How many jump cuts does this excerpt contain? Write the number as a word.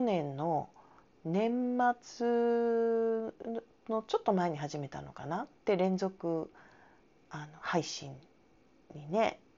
one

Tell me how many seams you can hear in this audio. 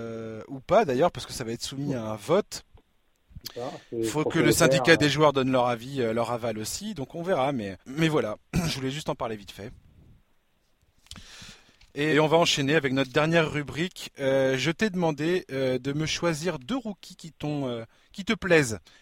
two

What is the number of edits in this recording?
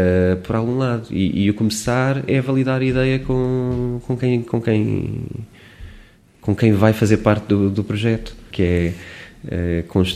two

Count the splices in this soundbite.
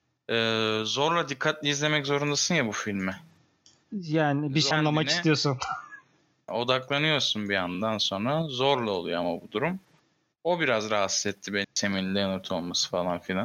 three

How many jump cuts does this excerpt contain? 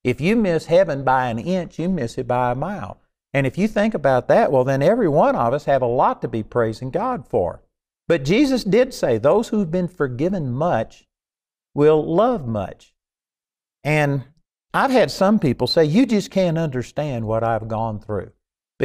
zero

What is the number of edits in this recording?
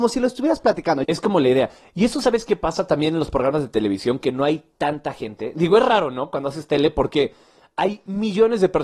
one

